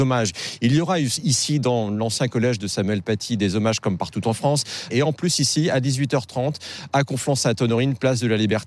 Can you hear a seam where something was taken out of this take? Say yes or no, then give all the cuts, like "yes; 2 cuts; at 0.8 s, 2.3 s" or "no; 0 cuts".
yes; 1 cut; at 4.9 s